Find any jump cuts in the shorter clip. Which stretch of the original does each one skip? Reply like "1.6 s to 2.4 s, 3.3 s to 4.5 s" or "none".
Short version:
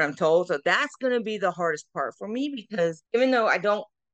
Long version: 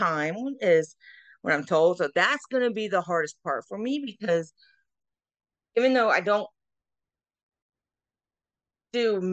4.6 s to 5.7 s

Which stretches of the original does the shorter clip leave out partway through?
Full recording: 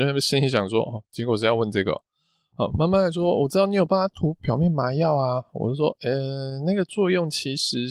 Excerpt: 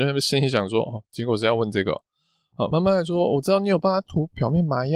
2.7 s to 2.8 s

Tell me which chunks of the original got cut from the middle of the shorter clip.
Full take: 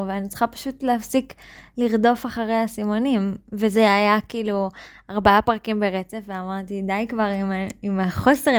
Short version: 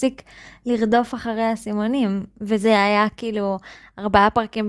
none

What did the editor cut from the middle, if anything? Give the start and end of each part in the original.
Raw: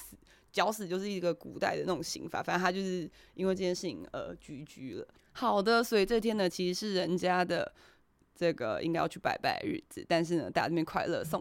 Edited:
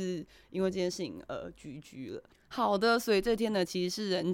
none

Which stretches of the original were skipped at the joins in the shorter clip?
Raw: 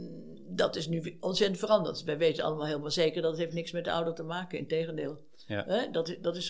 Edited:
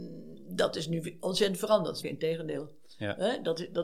2.0 s to 4.5 s

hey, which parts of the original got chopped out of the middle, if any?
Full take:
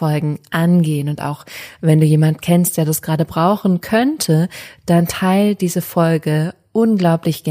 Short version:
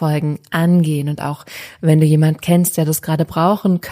none

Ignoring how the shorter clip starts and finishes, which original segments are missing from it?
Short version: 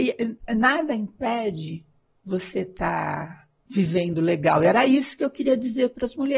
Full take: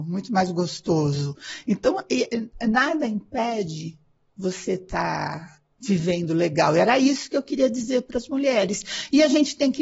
none

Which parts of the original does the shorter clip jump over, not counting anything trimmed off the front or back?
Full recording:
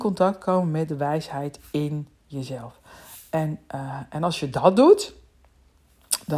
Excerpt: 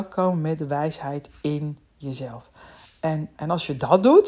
3.6 s to 4.1 s

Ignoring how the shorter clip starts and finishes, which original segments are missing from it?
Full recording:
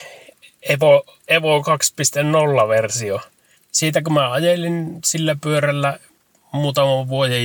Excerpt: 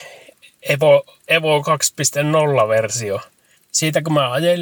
none

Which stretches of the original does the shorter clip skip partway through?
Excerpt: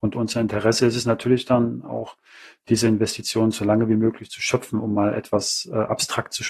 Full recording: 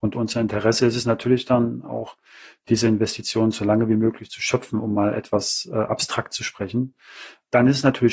none

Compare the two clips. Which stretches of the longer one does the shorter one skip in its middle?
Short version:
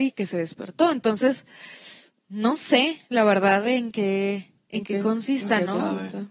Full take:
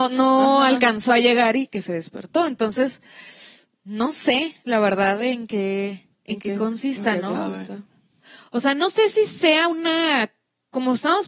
none

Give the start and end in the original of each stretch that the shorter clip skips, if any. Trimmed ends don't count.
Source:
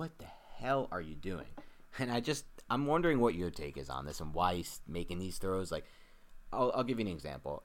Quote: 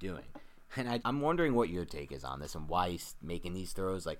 2.2 s to 2.6 s

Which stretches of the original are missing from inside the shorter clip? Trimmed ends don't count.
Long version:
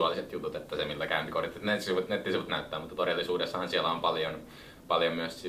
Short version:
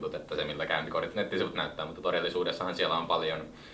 1.5 s to 2.1 s

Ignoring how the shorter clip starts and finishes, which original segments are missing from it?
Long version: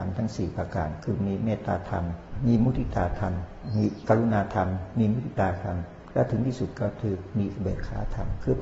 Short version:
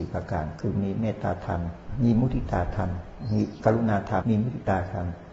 4.7 s to 4.9 s

